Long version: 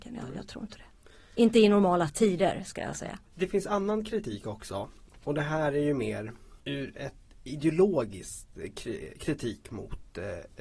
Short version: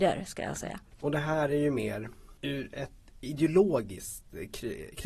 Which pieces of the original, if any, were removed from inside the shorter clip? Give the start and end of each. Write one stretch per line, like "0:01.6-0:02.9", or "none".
0:03.3-0:05.1